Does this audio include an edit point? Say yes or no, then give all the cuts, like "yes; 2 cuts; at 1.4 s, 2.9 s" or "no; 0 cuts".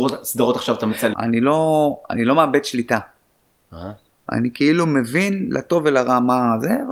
yes; 1 cut; at 1.1 s